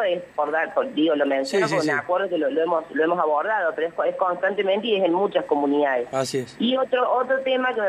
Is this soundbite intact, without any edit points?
yes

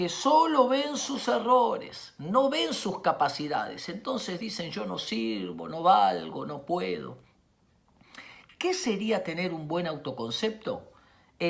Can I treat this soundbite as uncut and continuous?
yes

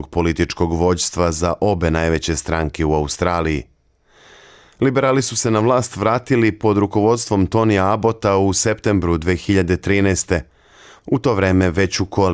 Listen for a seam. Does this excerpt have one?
no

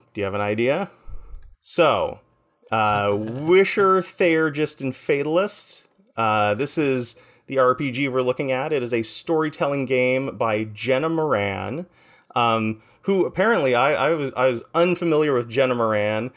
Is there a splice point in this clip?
yes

